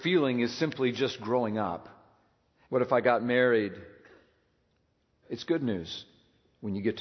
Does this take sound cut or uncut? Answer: cut